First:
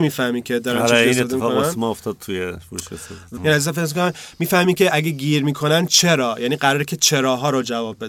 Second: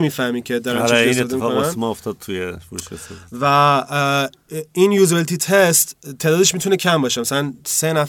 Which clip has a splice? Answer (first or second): first